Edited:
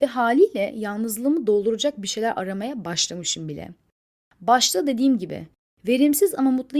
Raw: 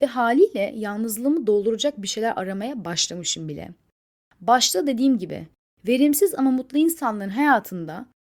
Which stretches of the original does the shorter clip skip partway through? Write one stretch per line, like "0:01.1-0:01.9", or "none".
none